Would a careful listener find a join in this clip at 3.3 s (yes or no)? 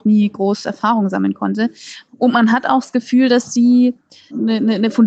no